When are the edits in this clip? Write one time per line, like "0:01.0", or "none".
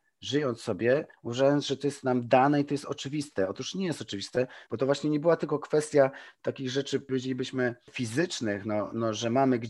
0:04.7